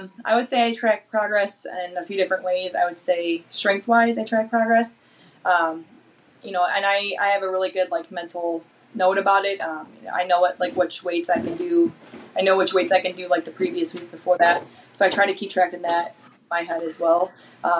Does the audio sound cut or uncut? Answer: uncut